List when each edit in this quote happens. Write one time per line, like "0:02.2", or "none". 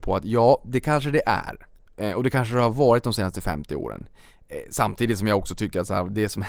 none